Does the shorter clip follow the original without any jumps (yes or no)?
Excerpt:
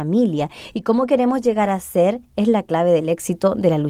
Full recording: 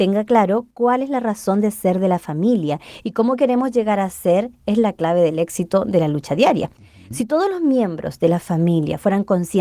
yes